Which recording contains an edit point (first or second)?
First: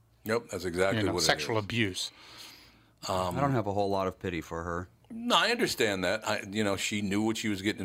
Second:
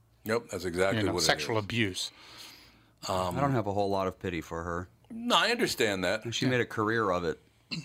second